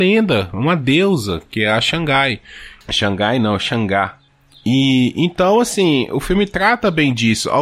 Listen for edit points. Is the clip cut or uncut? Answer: uncut